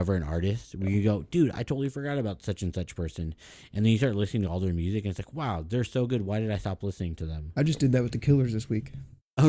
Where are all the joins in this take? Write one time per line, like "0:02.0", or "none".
none